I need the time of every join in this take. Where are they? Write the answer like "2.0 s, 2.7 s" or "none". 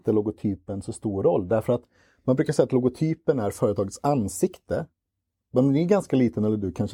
none